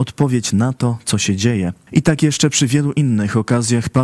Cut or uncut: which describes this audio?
cut